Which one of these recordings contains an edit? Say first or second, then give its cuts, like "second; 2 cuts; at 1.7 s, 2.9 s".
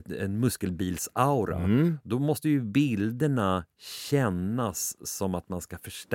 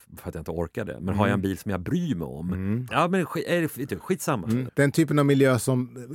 second; 2 cuts; at 2.9 s, 4.7 s